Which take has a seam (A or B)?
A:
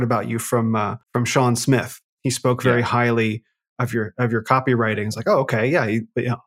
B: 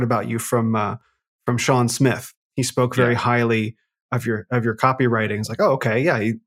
A